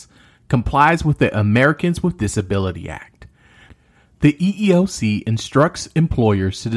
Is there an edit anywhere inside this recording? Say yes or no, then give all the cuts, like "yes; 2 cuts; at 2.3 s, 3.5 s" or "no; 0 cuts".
no; 0 cuts